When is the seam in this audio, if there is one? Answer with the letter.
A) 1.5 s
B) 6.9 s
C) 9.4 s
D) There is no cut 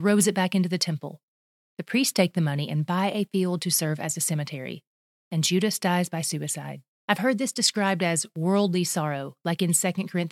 B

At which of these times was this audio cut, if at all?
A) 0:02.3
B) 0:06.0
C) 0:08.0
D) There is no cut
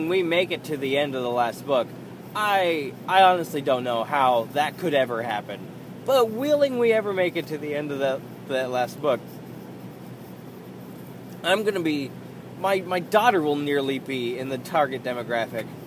B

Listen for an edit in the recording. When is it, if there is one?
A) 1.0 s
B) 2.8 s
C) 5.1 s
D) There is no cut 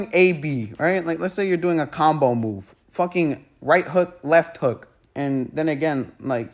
C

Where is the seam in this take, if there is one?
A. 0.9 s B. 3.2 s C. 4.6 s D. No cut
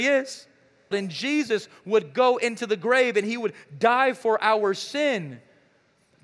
A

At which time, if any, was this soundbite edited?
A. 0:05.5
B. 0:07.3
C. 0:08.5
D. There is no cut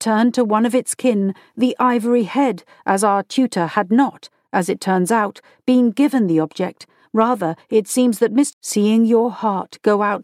C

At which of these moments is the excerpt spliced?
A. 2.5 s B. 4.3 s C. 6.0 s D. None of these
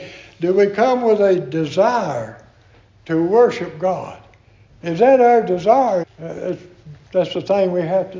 C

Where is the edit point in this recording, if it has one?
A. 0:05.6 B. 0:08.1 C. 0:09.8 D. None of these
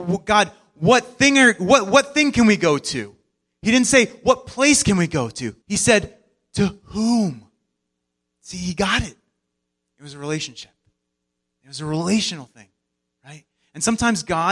A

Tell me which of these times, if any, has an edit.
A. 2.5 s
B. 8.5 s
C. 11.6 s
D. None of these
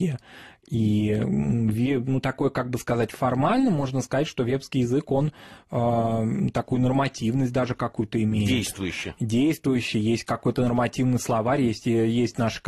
D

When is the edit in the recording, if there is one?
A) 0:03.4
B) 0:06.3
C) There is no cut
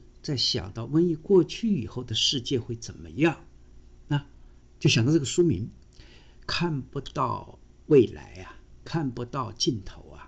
C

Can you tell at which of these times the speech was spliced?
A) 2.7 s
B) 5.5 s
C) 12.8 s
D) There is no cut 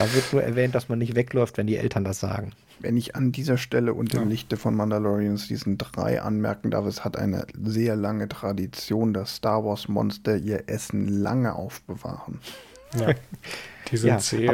D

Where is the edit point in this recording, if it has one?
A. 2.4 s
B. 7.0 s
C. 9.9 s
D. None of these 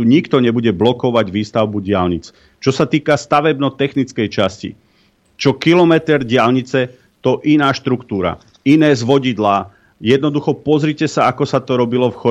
D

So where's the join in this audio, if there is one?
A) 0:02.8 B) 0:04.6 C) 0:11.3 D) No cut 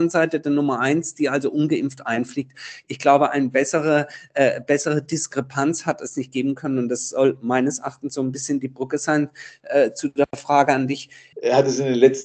C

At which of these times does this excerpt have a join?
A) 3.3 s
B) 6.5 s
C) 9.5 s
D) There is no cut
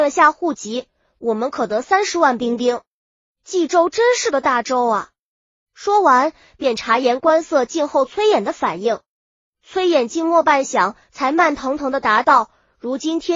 D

